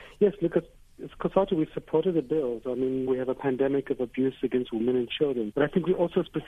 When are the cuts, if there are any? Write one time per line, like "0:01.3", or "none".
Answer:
0:03.1
0:05.5